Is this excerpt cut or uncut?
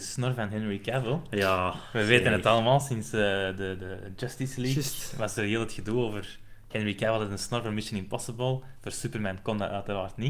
uncut